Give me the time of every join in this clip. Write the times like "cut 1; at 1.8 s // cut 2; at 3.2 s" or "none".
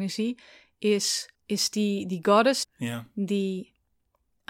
cut 1; at 1.4 s // cut 2; at 2.6 s